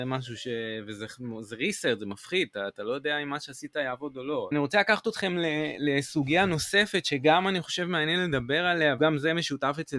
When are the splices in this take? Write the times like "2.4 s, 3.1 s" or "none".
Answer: 4.5 s, 9.0 s